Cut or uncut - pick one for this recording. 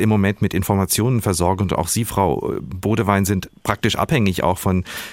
uncut